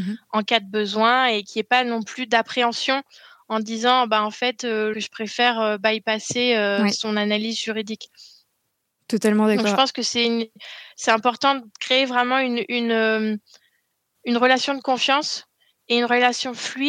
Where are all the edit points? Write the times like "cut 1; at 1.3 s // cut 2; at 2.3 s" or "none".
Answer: cut 1; at 4.9 s